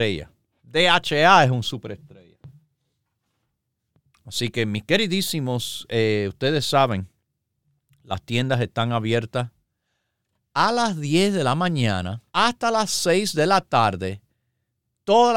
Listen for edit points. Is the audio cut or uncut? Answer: cut